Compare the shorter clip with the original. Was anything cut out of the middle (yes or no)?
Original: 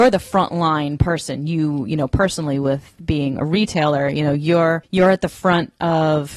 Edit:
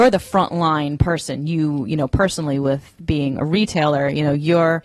no